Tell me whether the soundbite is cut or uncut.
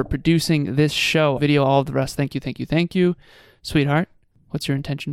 cut